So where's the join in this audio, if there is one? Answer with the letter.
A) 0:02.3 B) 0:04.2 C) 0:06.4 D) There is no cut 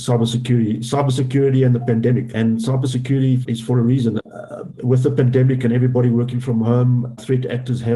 A